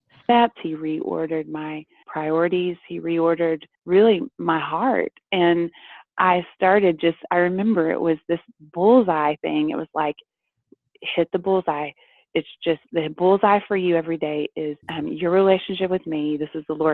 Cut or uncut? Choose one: cut